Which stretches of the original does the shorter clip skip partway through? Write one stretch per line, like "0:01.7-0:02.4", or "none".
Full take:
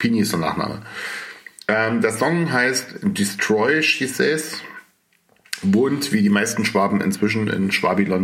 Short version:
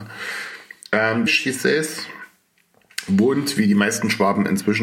0:02.0-0:03.8

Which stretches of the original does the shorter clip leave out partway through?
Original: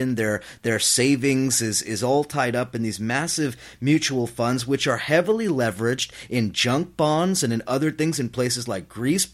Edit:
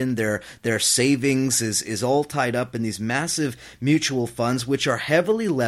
none

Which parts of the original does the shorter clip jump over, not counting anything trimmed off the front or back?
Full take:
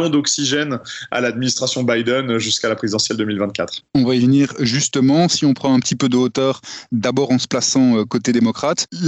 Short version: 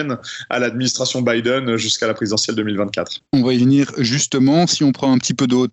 none

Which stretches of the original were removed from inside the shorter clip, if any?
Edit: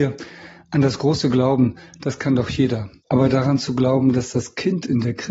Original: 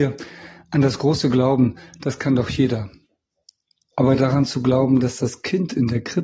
0:03.0-0:03.9

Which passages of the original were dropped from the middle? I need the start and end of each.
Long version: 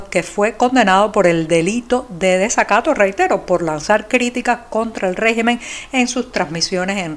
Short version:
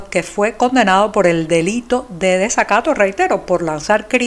none

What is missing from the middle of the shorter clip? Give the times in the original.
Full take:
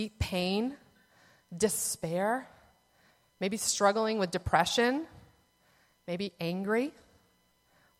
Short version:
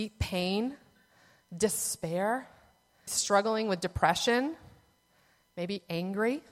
0:03.1-0:03.6

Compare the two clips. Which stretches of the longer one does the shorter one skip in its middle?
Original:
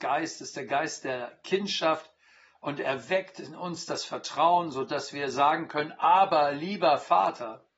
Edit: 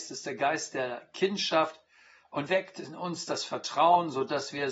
0:02.8-0:03.1

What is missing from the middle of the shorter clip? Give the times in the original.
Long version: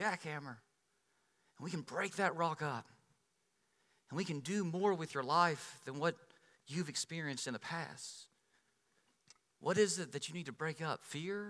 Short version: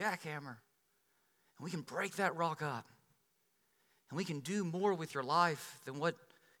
none

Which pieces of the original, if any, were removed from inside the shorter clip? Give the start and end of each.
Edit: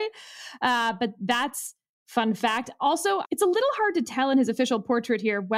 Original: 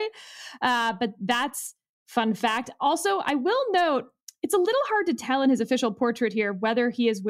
0:03.2-0:04.4

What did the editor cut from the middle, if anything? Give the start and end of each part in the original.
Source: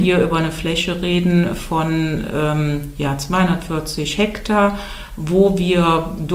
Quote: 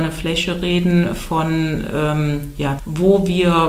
0:03.2-0:05.1

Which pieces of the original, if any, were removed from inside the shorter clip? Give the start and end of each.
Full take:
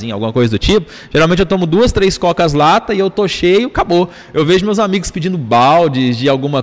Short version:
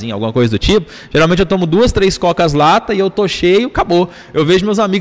none

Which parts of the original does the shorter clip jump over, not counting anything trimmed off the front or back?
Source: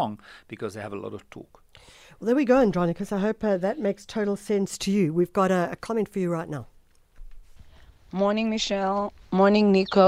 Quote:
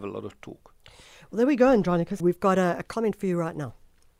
0:03.1-0:05.1

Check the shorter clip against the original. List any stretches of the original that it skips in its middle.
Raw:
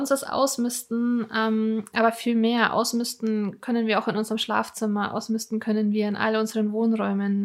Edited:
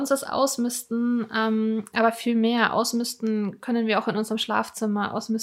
none

